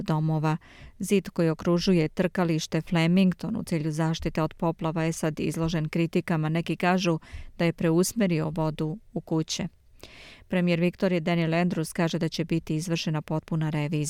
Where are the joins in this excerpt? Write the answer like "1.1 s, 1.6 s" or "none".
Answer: none